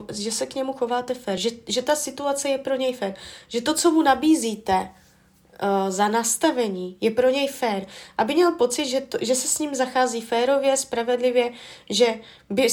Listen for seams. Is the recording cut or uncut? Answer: uncut